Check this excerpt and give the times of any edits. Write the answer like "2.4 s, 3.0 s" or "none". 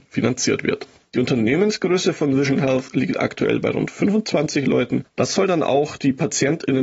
5.0 s